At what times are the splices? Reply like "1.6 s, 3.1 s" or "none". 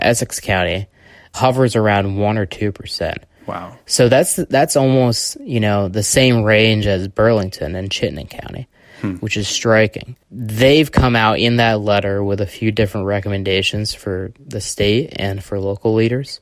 none